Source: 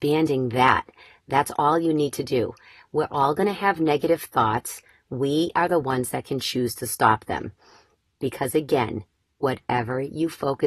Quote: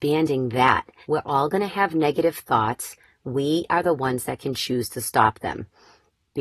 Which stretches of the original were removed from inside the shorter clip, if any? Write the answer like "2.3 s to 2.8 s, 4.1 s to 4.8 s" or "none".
1.0 s to 2.9 s